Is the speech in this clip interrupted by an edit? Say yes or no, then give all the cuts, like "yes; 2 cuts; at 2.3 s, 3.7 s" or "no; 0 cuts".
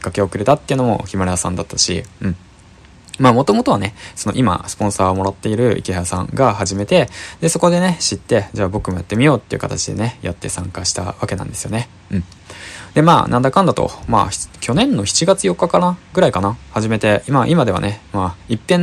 no; 0 cuts